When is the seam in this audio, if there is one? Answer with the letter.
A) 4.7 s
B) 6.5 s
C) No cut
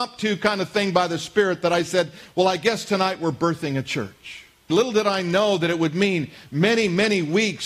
A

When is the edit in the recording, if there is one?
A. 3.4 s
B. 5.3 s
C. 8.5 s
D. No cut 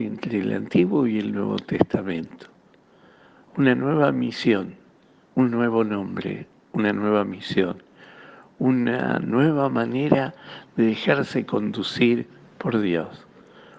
B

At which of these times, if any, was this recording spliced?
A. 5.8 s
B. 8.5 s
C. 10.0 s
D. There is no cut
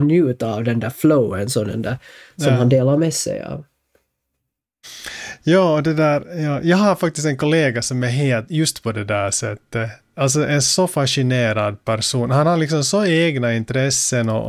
D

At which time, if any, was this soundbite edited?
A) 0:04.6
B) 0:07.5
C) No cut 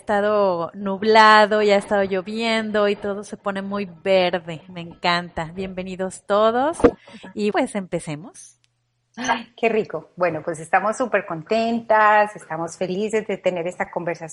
B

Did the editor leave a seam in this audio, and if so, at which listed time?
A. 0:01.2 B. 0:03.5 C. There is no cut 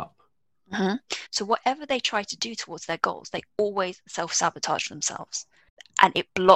A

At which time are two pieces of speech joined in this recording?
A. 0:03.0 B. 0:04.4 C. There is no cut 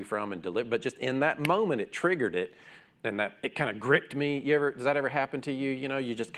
C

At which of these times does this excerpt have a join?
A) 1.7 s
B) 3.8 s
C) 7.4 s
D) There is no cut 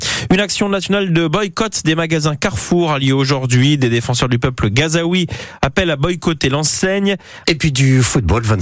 C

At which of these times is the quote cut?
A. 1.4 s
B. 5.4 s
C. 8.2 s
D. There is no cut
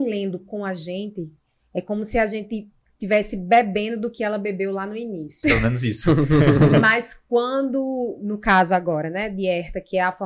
B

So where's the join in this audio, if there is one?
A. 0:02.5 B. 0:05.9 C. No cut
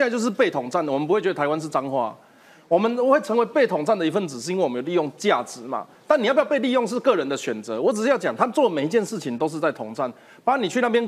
C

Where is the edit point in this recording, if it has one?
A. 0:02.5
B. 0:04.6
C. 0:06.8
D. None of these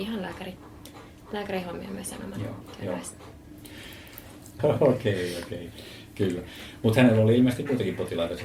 B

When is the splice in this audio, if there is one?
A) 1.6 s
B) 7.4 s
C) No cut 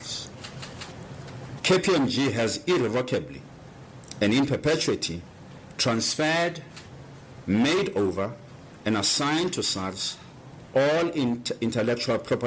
A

